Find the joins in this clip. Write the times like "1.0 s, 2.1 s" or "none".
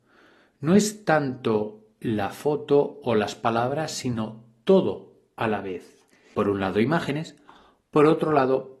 6.3 s